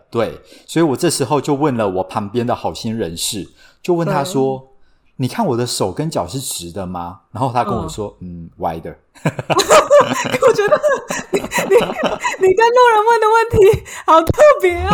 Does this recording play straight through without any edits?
yes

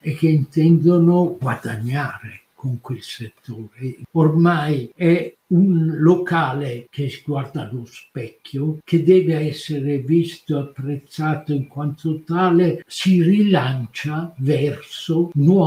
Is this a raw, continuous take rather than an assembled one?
yes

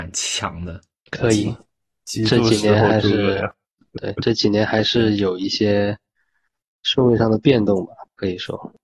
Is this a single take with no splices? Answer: no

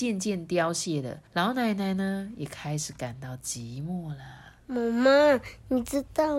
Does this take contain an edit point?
yes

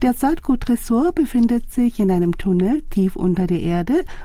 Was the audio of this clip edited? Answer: no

